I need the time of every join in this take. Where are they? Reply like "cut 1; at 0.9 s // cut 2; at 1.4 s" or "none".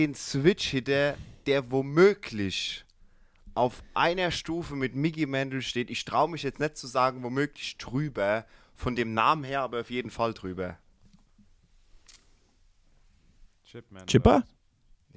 none